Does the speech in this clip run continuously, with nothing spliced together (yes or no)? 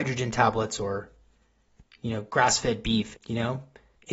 no